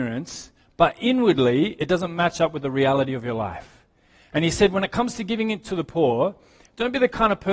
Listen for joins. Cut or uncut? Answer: uncut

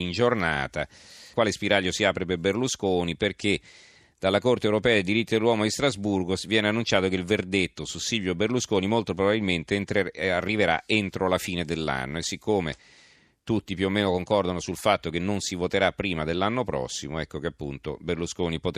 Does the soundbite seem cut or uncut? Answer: cut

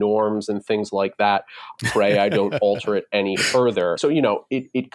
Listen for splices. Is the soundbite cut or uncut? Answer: cut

